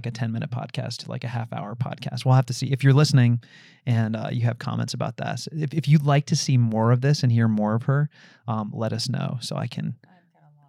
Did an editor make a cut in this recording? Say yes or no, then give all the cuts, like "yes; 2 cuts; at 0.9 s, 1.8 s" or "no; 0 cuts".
no; 0 cuts